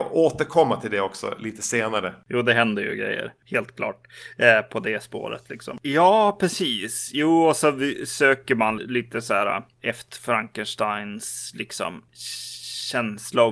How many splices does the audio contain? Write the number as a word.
two